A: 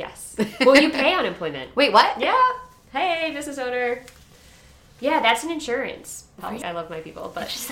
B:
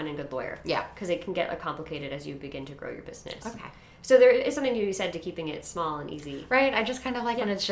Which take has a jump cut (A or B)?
A